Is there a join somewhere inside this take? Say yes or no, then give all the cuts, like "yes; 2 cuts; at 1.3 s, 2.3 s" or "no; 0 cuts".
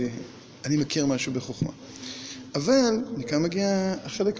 no; 0 cuts